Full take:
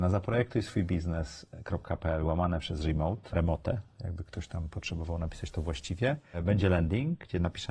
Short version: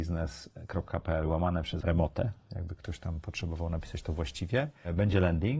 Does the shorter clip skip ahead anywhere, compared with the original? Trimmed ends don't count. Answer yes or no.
yes